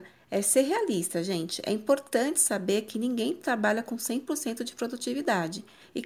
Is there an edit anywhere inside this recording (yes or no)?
no